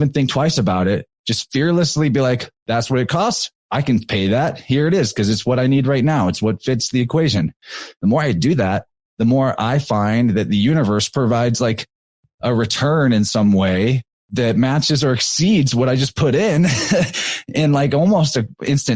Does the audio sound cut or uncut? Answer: uncut